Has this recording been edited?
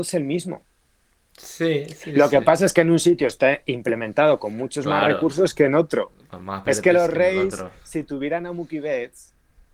no; 0 cuts

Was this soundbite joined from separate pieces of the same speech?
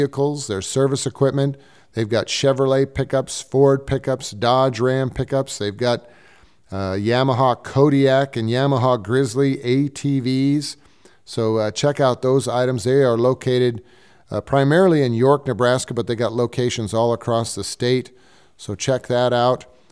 no; 0 cuts

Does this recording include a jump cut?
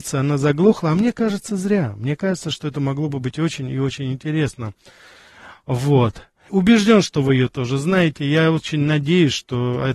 yes; 1 cut; at 6.5 s

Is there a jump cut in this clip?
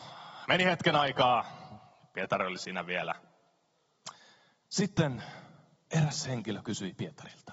no; 0 cuts

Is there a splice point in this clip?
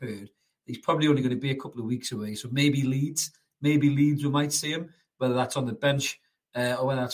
no; 0 cuts

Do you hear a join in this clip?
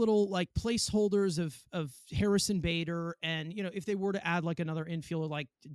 no; 0 cuts

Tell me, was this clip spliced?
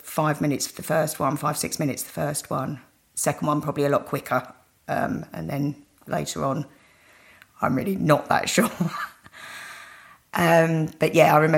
no; 0 cuts

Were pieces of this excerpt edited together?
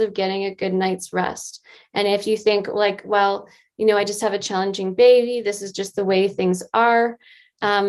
no; 0 cuts

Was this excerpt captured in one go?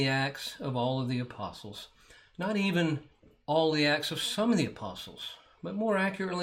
yes; 0 cuts

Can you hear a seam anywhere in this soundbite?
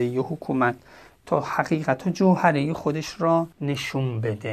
yes; 1 cut; at 3.5 s

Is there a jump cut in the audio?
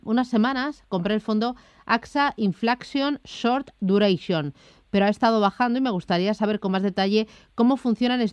no; 0 cuts

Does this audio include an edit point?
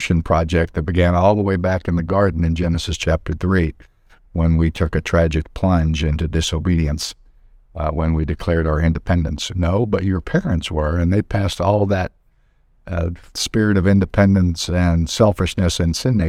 yes; 1 cut; at 9.5 s

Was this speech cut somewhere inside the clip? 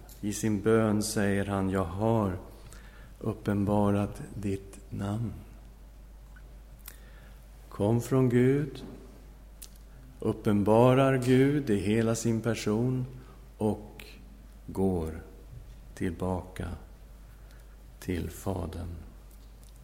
yes; 1 cut; at 10.1 s

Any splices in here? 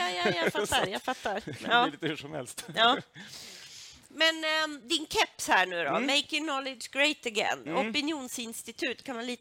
no; 0 cuts

